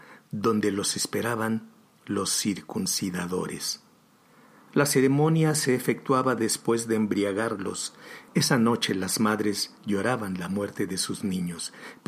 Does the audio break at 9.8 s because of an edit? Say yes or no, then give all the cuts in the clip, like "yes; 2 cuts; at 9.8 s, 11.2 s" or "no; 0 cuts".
yes; 2 cuts; at 8.3 s, 9.8 s